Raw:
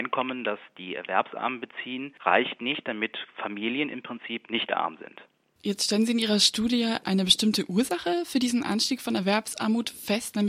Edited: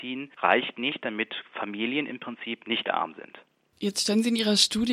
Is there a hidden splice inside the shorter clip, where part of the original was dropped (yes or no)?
no